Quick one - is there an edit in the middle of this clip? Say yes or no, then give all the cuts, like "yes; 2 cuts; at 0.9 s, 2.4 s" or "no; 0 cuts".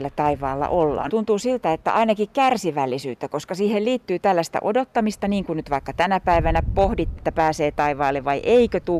yes; 2 cuts; at 1.1 s, 7.2 s